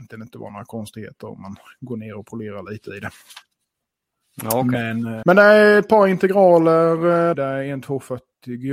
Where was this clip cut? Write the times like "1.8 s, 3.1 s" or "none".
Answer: 5.2 s, 7.3 s